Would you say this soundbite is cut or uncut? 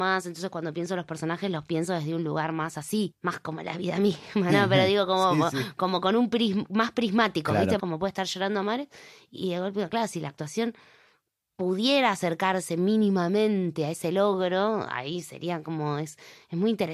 cut